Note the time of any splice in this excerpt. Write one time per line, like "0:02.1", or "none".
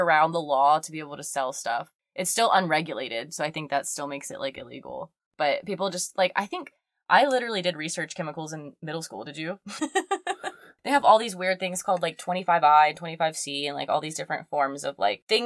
0:09.8